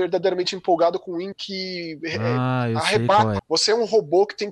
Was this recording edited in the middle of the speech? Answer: yes; 2 cuts; at 1.3 s, 3.4 s

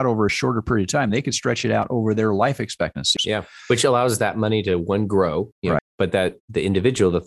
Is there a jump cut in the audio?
yes; 2 cuts; at 3.2 s, 5.8 s

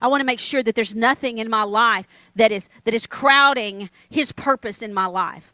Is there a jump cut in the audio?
no; 0 cuts

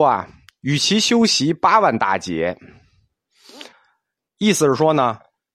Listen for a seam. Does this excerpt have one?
yes; 1 cut; at 3.7 s

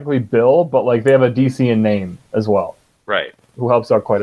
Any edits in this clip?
no; 0 cuts

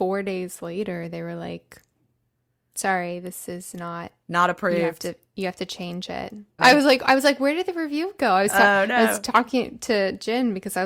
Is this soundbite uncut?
no; 1 cut; at 6.6 s

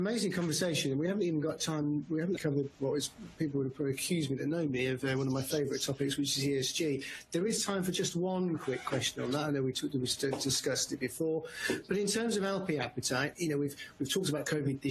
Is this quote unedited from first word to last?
no; 2 cuts; at 2.4 s, 13.3 s

